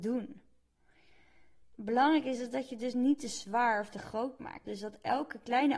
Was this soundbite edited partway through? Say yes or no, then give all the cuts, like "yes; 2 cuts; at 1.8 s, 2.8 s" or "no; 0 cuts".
yes; 2 cuts; at 1.7 s, 4.6 s